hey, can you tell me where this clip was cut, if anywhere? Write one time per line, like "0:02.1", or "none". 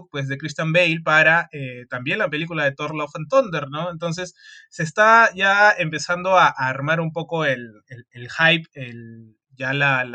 none